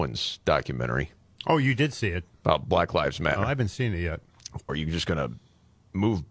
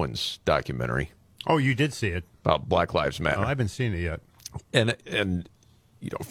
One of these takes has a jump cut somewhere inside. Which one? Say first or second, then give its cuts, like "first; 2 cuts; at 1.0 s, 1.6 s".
first; 1 cut; at 4.7 s